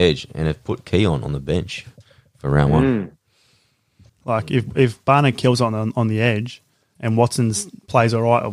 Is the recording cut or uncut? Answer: cut